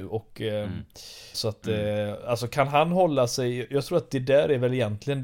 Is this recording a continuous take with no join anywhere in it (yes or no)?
no